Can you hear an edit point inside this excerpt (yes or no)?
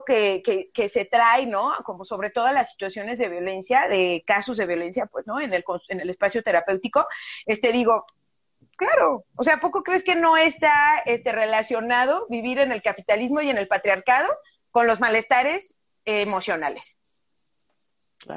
no